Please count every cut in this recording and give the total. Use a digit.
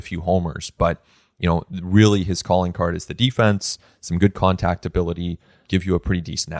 0